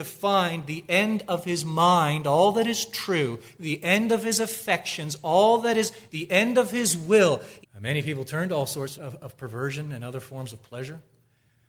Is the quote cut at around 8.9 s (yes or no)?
yes